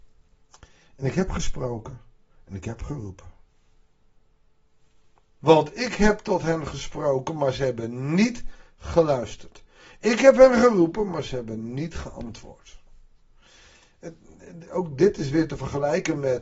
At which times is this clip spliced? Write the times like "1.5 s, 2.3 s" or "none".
5.4 s